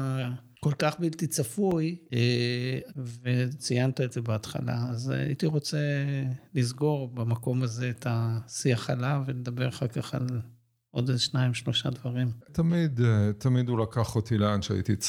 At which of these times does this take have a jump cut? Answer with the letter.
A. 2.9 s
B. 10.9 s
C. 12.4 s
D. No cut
A